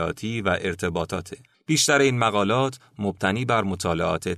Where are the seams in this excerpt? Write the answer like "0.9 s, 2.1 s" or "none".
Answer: 1.5 s